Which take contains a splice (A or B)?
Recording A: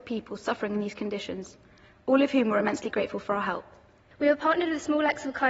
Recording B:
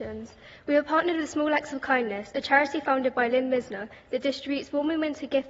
A